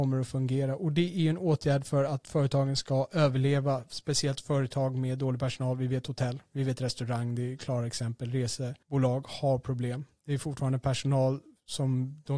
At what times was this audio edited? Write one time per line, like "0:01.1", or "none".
0:08.8